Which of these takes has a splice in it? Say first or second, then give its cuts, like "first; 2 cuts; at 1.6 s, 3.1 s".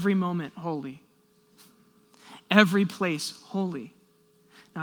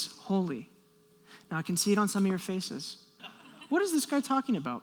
second; 1 cut; at 3.2 s